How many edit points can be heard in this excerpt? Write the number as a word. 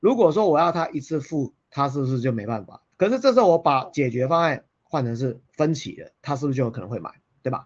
one